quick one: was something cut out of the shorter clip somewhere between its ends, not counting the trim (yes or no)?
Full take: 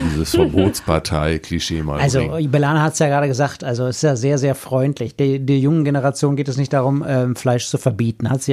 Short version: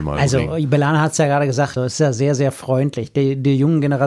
yes